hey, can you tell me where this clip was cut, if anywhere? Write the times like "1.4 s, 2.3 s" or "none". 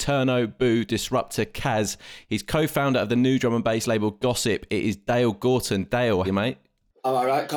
6.2 s